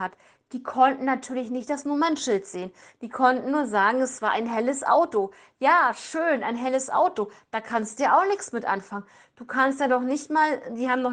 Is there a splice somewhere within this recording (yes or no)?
no